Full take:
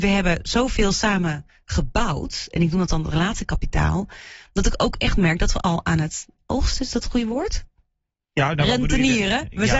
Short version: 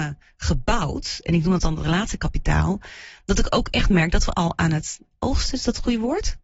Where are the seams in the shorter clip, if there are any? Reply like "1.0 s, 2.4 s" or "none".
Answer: none